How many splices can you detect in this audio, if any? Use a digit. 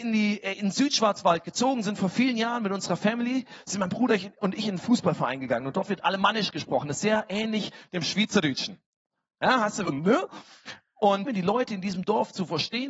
2